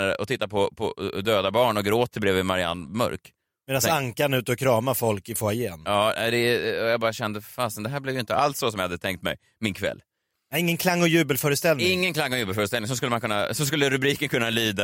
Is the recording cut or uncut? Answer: uncut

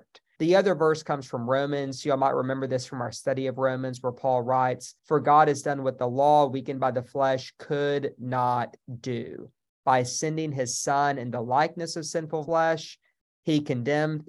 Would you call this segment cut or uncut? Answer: uncut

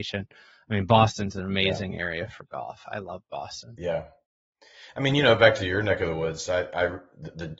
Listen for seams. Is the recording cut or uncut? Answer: uncut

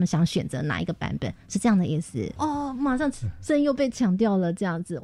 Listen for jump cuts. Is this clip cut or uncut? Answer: cut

